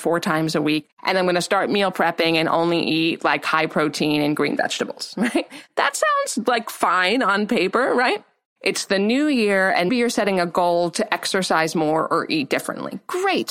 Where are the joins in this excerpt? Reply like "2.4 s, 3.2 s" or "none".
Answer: 8.4 s, 9.9 s

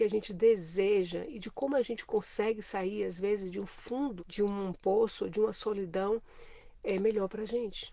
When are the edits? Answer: 4.2 s

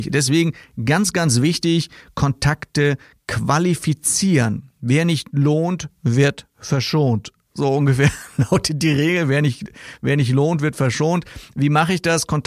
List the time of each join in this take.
none

